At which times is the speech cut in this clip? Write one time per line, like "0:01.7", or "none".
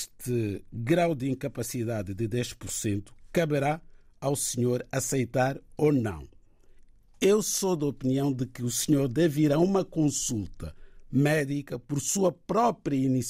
none